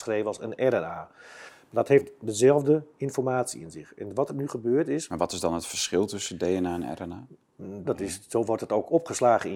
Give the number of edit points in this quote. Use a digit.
2